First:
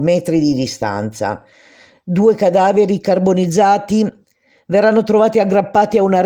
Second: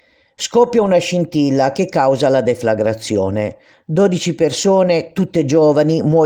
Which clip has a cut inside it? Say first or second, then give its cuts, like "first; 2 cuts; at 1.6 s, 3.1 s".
first; 1 cut; at 2.0 s